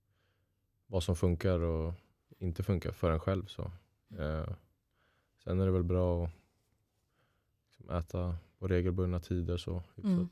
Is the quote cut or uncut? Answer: uncut